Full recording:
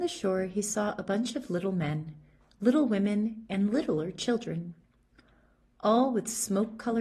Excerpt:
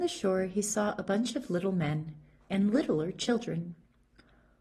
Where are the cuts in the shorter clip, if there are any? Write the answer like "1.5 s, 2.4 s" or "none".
2.5 s